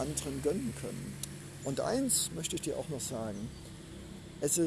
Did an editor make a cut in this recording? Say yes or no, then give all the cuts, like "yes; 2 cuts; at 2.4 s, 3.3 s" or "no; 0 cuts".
no; 0 cuts